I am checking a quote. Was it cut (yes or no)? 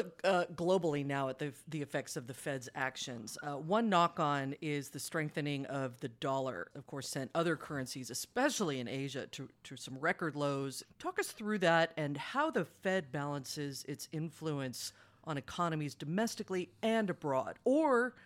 yes